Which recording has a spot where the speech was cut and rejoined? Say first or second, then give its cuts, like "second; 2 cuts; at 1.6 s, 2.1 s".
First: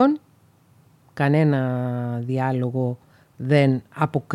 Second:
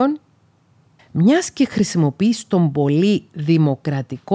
second; 1 cut; at 1.0 s